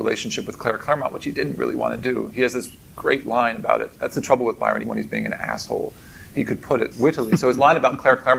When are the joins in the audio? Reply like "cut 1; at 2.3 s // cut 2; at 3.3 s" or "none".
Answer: cut 1; at 4.8 s // cut 2; at 6.9 s